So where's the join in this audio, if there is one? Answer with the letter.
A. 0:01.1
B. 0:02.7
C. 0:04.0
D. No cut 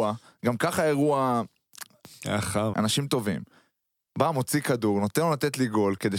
B